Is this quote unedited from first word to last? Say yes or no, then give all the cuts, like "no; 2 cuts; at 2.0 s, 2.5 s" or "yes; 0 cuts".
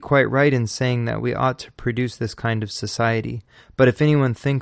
yes; 0 cuts